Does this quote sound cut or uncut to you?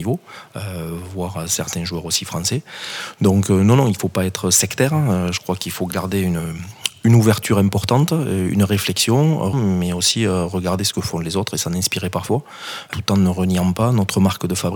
cut